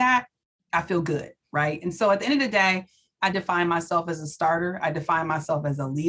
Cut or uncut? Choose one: cut